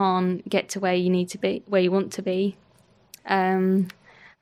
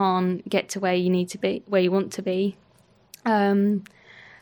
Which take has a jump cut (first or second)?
first